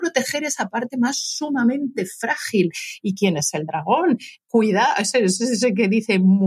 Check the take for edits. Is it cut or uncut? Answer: cut